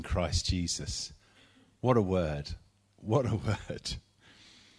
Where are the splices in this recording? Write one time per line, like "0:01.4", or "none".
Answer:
none